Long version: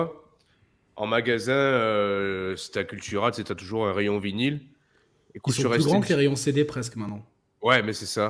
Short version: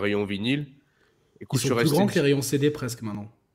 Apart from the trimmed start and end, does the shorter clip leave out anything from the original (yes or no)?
no